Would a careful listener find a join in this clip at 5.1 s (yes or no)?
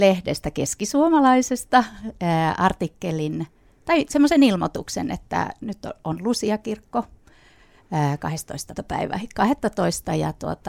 no